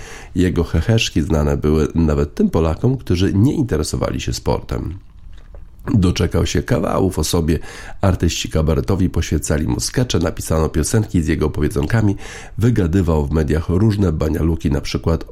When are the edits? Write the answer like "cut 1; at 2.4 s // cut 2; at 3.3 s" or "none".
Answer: none